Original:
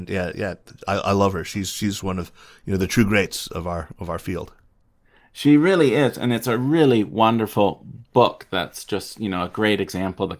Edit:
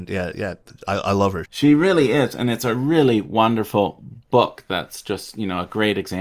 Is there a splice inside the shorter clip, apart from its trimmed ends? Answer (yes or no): yes